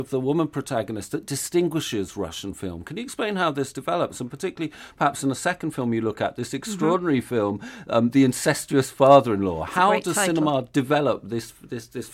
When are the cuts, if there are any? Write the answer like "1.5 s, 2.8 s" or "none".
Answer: none